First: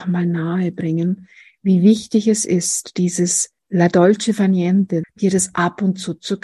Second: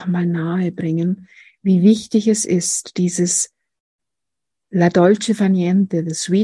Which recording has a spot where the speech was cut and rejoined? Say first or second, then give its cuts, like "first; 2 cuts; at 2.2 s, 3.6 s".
first; 2 cuts; at 3.6 s, 5.0 s